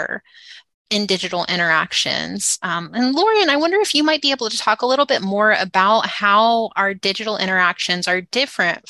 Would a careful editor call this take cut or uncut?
uncut